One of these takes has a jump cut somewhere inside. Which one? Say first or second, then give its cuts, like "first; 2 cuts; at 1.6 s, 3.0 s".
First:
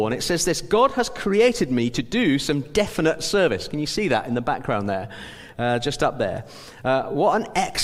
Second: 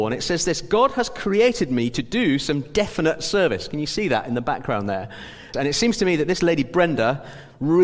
second; 1 cut; at 5.5 s